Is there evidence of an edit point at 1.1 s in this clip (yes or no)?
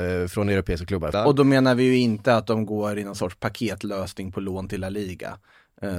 yes